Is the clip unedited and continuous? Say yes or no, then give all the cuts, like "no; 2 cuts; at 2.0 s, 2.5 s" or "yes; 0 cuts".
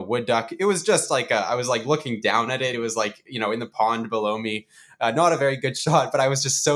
yes; 0 cuts